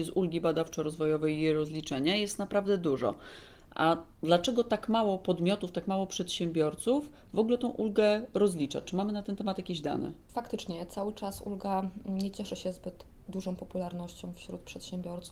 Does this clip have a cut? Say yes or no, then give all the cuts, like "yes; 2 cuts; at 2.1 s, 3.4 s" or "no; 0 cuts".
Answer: no; 0 cuts